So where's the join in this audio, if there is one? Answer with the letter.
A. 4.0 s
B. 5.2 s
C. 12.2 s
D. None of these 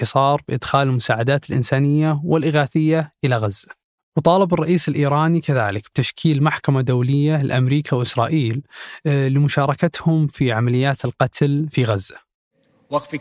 A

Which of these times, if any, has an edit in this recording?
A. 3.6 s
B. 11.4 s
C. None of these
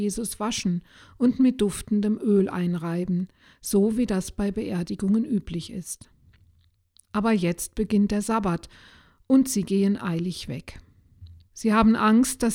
B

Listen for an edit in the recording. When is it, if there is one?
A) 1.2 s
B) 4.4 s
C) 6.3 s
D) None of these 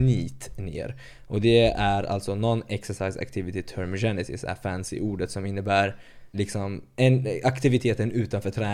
C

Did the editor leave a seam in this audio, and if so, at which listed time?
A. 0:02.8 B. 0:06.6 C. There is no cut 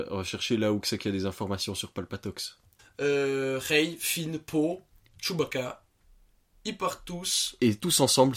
A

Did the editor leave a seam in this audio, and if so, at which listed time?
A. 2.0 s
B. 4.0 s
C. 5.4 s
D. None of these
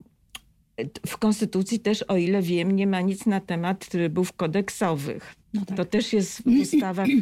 C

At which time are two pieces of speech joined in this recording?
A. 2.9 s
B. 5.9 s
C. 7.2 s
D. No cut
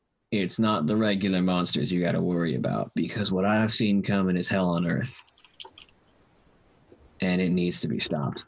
A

